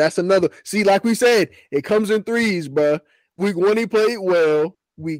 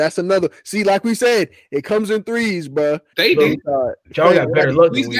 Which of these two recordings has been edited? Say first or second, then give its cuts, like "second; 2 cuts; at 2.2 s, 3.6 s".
second; 1 cut; at 3.1 s